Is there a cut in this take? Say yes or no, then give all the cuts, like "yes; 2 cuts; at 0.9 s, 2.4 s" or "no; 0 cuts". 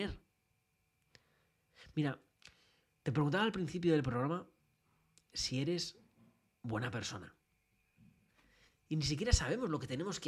no; 0 cuts